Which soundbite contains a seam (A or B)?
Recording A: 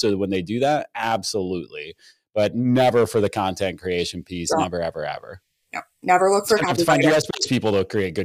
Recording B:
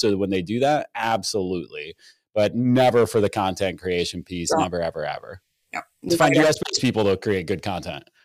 B